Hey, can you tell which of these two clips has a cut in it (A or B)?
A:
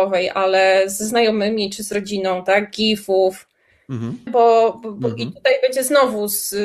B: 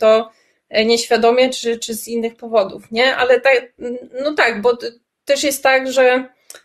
A